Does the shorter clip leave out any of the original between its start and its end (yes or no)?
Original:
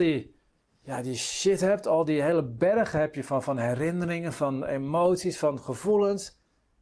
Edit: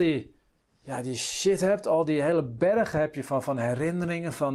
no